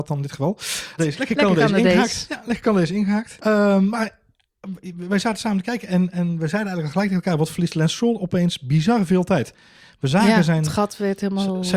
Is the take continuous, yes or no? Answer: no